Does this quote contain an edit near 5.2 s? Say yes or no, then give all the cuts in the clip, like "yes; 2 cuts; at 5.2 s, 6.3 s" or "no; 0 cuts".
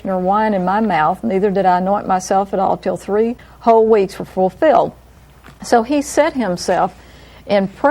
no; 0 cuts